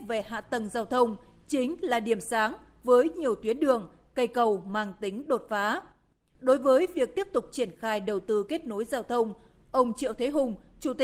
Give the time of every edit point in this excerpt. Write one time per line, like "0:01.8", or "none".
none